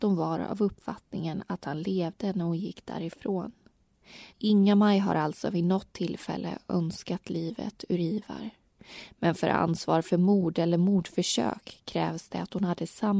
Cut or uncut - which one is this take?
cut